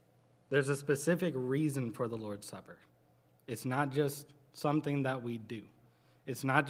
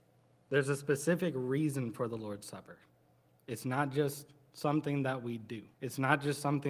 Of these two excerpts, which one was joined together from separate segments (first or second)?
second